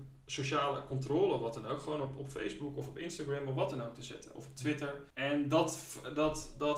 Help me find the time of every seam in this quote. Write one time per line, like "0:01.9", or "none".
0:05.1